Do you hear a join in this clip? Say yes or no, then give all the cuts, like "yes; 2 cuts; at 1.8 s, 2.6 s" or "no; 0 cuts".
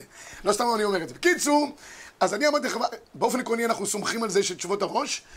no; 0 cuts